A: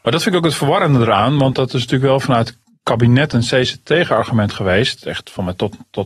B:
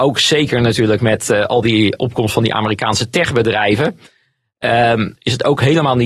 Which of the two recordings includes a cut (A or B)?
B